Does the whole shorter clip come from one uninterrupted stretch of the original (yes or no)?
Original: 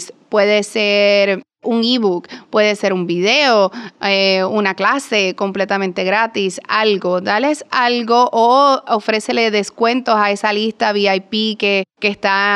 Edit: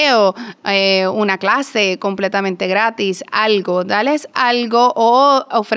yes